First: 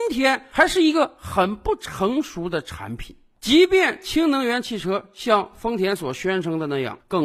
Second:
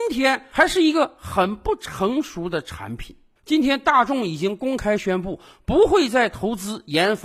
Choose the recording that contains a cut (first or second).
second